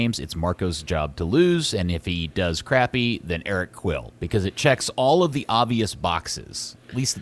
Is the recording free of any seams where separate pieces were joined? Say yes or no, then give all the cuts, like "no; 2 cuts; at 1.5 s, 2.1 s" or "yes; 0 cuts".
yes; 0 cuts